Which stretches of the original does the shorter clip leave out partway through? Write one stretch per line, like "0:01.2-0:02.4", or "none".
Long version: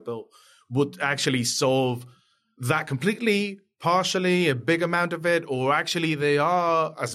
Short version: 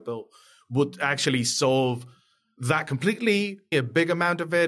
0:03.7-0:04.4